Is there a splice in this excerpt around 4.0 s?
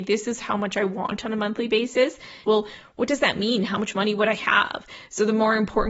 no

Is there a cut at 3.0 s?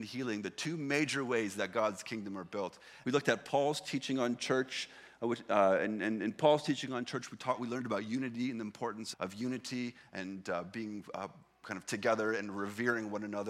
yes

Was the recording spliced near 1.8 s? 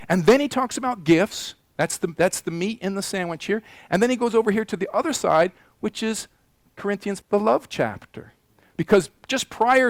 no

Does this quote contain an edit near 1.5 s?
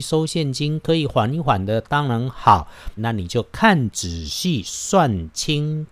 no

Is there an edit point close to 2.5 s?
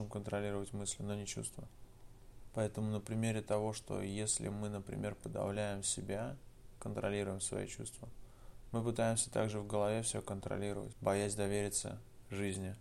yes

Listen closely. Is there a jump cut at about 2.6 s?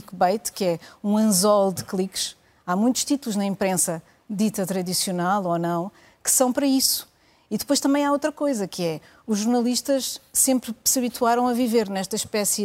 no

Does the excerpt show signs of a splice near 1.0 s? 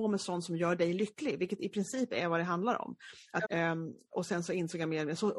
no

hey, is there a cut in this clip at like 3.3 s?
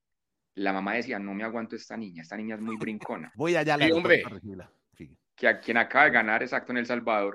yes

